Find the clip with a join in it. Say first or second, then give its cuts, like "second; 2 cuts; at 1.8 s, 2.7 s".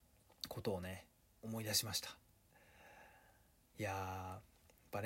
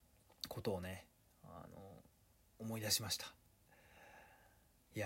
first; 1 cut; at 1.2 s